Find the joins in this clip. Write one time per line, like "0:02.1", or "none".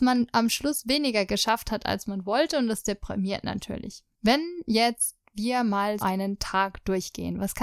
0:04.2
0:06.0